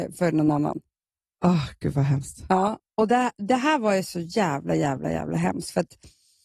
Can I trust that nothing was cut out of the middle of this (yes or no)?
yes